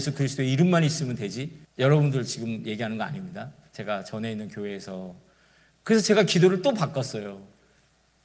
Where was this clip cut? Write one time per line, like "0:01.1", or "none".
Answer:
0:01.6
0:05.7

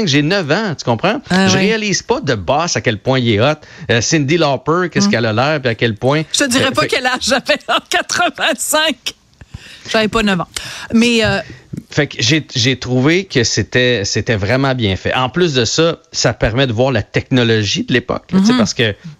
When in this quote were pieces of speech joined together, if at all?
none

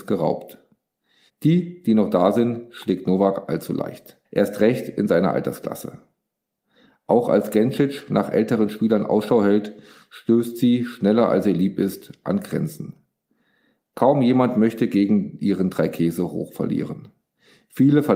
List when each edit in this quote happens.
0:01.3
0:04.2

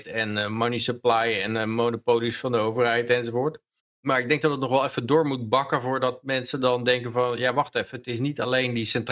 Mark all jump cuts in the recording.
none

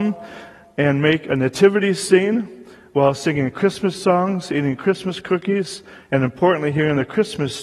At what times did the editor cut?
none

